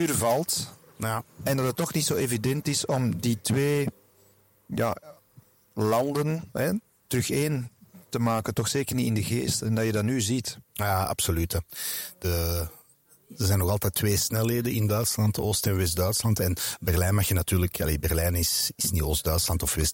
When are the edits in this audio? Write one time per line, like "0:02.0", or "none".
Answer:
none